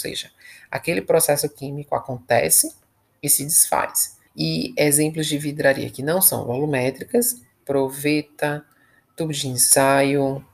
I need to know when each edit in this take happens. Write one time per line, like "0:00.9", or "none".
0:04.3
0:07.6